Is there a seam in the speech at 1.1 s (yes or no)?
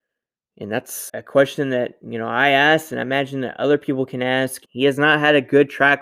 yes